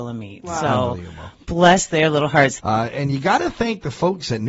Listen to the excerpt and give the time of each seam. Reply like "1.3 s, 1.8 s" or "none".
2.6 s